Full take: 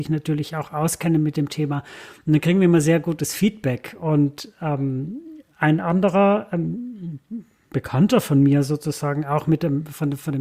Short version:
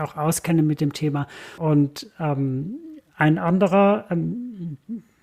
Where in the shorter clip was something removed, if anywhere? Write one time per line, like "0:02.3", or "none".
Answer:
0:01.6